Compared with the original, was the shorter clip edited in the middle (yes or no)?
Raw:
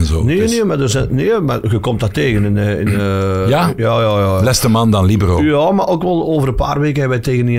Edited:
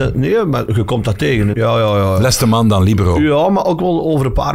yes